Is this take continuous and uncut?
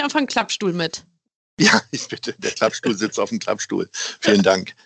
yes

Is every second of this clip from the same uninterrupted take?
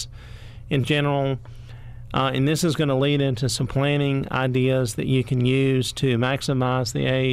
yes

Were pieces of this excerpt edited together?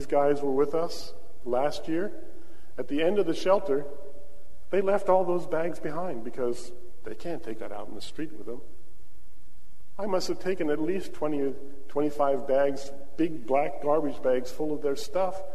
no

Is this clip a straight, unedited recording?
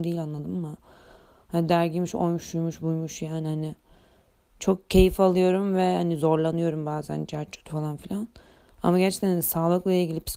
yes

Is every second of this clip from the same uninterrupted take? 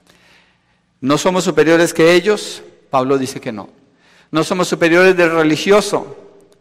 yes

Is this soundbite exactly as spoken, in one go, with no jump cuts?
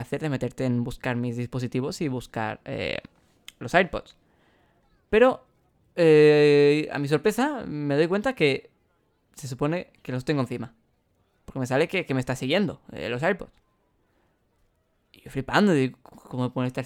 yes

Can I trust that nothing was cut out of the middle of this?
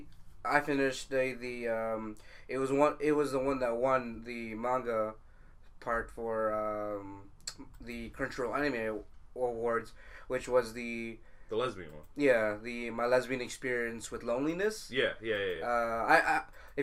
yes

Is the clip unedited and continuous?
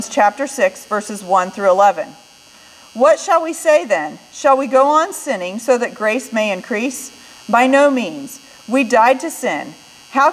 yes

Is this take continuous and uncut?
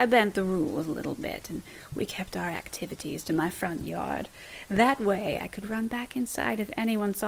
yes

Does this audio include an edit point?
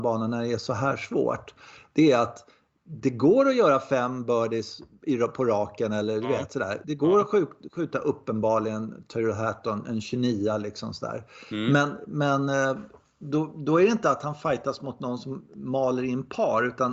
no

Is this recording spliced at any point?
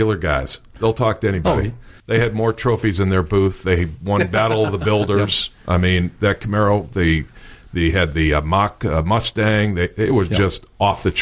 yes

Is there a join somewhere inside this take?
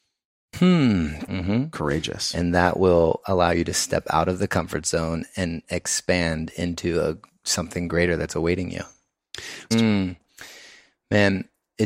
yes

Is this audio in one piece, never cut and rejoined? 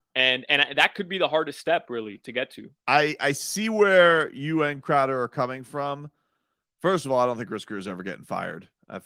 no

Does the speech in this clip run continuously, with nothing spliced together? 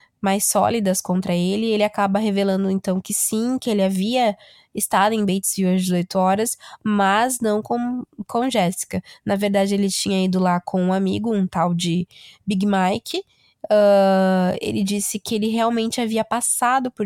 yes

